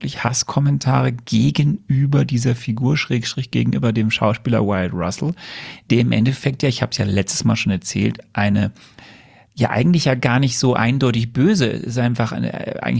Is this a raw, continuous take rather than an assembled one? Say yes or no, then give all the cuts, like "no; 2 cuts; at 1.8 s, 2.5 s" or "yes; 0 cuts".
yes; 0 cuts